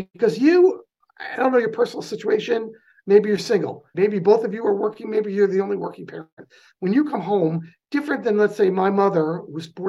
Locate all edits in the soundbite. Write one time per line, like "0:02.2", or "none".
0:03.9